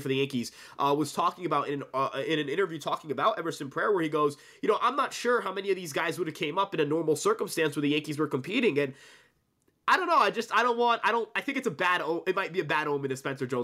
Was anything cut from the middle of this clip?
no; 0 cuts

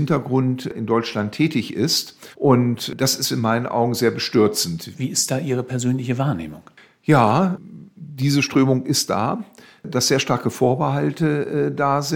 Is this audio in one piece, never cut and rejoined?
no; 2 cuts; at 2.3 s, 4.9 s

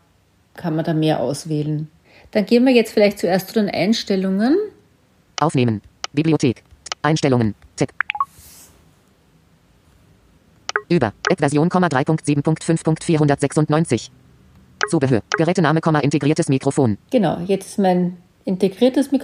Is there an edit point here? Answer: yes; 3 cuts; at 11.2 s, 15.3 s, 17.0 s

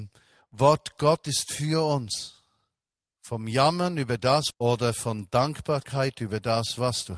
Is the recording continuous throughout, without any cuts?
no; 2 cuts; at 3.1 s, 4.5 s

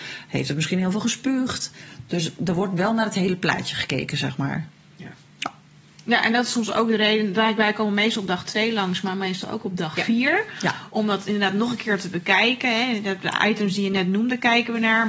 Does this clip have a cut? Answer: no; 0 cuts

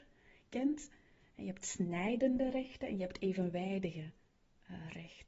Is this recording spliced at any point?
no; 0 cuts

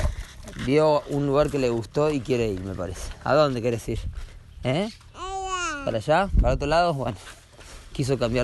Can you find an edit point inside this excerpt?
no; 0 cuts

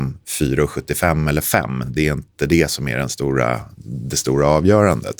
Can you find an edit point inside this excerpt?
no; 0 cuts

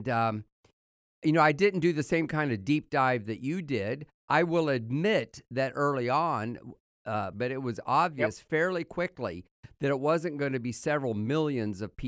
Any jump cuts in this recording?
yes; 1 cut; at 7.3 s

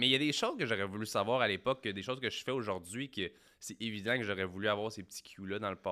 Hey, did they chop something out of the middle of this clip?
no; 0 cuts

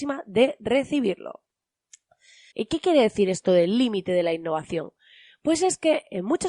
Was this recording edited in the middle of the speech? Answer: yes; 1 cut; at 2.5 s

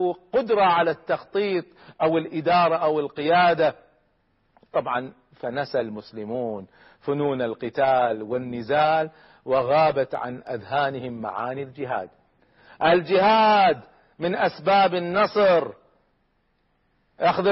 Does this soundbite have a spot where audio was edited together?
no; 0 cuts

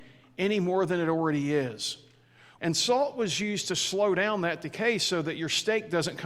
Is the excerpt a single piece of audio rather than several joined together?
no; 1 cut; at 2.6 s

